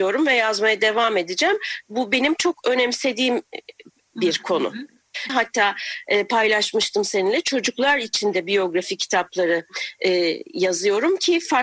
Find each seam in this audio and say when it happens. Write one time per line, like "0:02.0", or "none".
0:05.3